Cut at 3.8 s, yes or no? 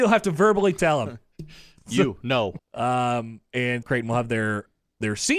yes